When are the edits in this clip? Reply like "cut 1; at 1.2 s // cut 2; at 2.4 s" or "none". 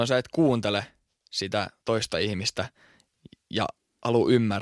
cut 1; at 1.8 s